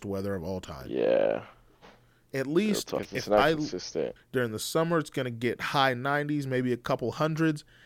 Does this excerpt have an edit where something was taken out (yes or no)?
yes